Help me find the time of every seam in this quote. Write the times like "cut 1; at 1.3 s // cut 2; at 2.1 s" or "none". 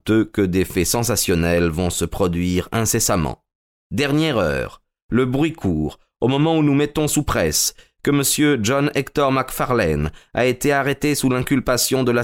none